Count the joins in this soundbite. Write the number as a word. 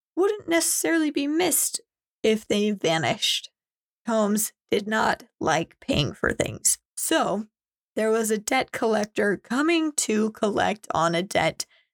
two